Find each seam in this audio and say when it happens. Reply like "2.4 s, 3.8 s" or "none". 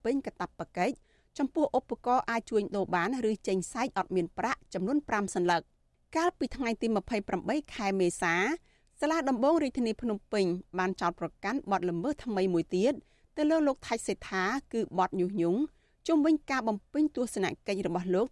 none